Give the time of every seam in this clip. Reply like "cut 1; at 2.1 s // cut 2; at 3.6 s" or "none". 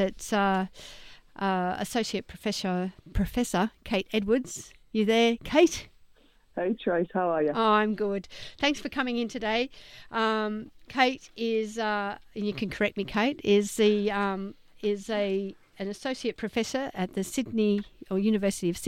none